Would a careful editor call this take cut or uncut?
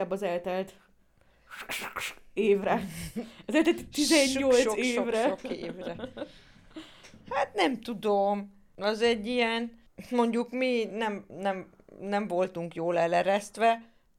uncut